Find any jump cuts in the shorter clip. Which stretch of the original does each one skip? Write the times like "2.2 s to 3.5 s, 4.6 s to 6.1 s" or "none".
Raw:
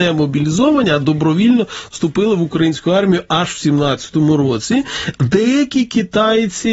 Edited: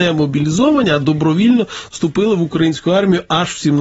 none